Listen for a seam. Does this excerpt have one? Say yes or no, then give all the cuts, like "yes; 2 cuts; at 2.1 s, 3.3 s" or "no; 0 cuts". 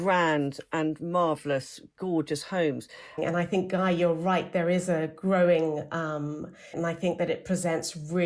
yes; 2 cuts; at 3.2 s, 6.7 s